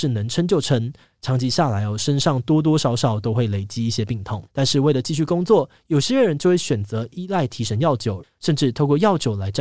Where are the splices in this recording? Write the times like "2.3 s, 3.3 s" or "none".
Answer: 4.5 s, 8.2 s